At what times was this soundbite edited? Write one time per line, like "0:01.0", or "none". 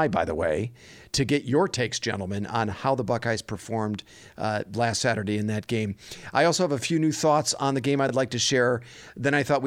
none